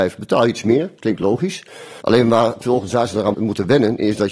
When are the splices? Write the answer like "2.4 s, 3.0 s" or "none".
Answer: 2.0 s, 3.3 s